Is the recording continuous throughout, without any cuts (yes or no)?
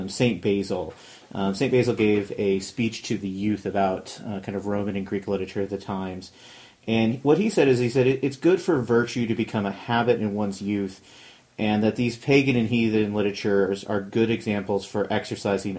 yes